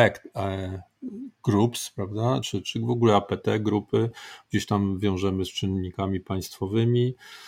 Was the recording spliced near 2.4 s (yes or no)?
no